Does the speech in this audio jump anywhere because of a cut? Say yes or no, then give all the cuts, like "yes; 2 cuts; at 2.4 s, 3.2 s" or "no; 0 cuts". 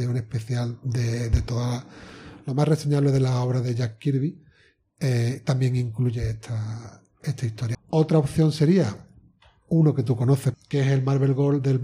yes; 2 cuts; at 7.7 s, 10.5 s